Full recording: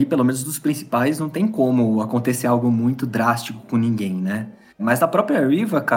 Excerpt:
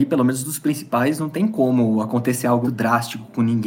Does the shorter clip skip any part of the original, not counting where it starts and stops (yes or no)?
yes